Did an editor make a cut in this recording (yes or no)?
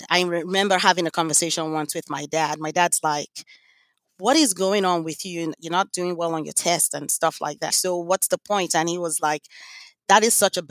yes